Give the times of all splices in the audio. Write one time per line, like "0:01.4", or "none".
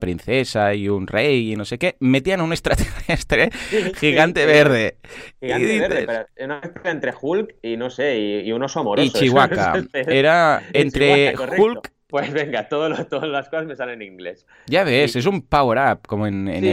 0:12.1